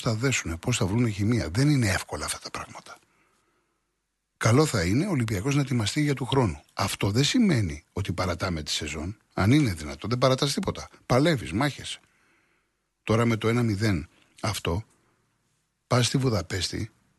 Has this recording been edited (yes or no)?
no